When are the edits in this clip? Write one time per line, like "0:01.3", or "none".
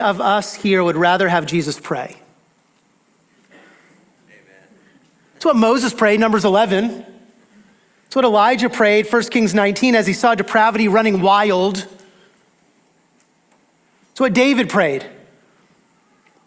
0:04.2